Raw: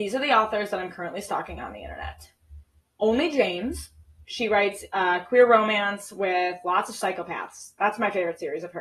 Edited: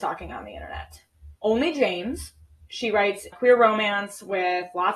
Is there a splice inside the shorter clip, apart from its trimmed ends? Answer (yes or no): yes